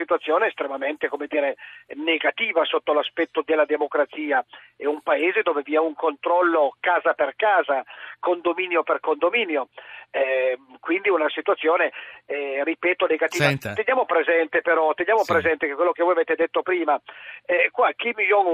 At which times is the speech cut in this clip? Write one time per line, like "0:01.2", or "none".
none